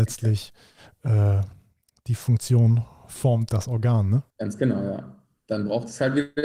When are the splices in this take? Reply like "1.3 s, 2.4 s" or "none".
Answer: 4.3 s